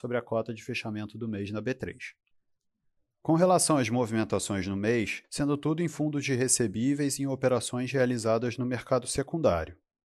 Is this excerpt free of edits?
no; 1 cut; at 5.2 s

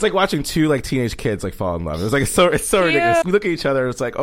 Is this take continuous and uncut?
no; 1 cut; at 3.2 s

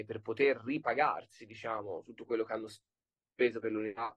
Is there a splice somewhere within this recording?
no; 0 cuts

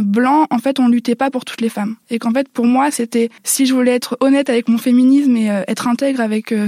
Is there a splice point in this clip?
yes; 2 cuts; at 2.0 s, 3.4 s

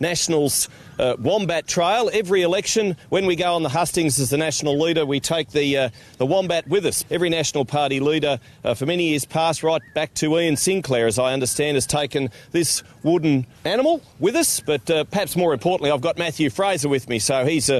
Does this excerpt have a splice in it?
yes; 1 cut; at 13.5 s

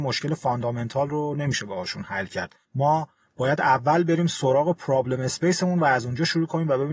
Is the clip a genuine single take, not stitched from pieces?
no; 1 cut; at 2.6 s

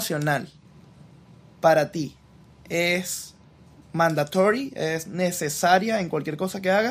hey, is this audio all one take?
yes; 0 cuts

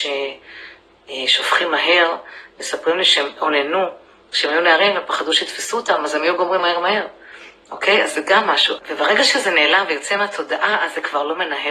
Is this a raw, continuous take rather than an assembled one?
no; 2 cuts; at 6.6 s, 8.8 s

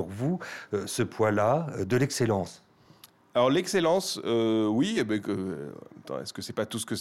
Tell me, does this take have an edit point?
no; 0 cuts

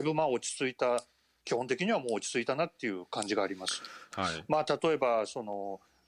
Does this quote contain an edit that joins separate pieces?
yes; 1 cut; at 4.1 s

